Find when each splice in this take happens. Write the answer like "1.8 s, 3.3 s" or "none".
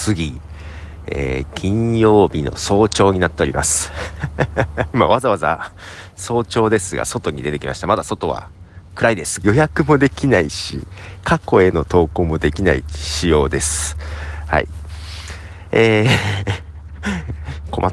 4.9 s, 9.4 s